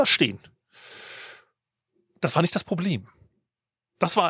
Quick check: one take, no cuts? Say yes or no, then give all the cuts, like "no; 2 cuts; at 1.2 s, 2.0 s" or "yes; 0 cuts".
yes; 0 cuts